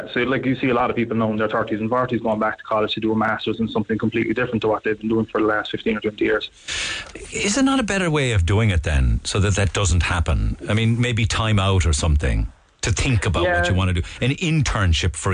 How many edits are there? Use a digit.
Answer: 0